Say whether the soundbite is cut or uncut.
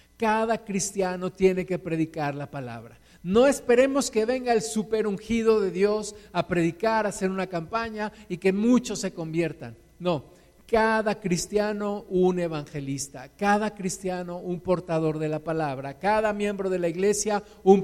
uncut